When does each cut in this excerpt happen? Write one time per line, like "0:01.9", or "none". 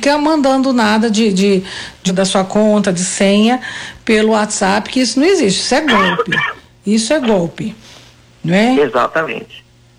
0:02.1